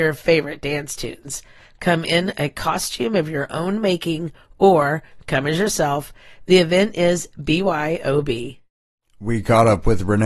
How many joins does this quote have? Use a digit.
0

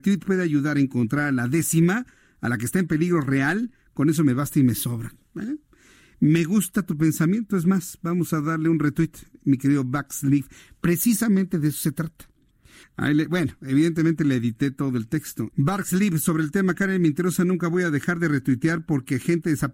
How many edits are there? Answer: 2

